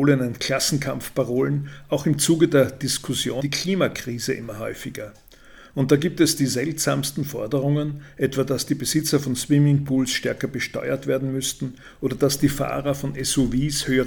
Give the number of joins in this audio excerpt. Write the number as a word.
one